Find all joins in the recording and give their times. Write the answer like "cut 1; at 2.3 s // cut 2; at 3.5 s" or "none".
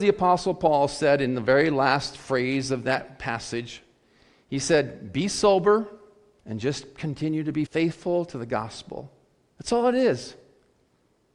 cut 1; at 6.4 s // cut 2; at 7.7 s // cut 3; at 9.5 s